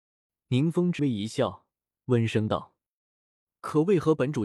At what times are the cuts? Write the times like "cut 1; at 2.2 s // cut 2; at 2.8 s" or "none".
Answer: cut 1; at 1.0 s